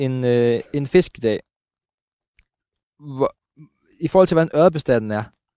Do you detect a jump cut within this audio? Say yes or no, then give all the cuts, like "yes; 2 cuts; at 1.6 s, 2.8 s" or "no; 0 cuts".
no; 0 cuts